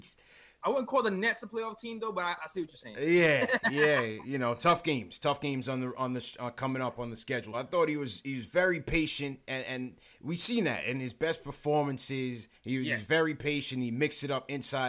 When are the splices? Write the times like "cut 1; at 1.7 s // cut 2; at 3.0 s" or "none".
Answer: cut 1; at 7.5 s // cut 2; at 12.5 s